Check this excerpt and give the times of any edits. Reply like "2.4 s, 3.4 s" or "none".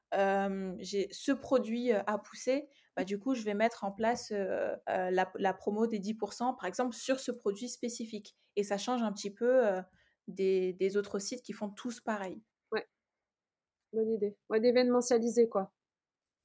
4.8 s